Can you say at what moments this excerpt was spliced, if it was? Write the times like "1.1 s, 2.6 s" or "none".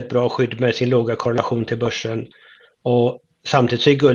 none